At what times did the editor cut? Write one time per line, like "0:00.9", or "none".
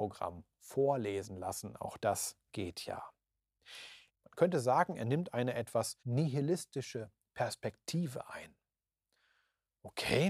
0:04.1
0:06.0